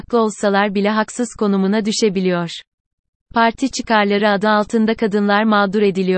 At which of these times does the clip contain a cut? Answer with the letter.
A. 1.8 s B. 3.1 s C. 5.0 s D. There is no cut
D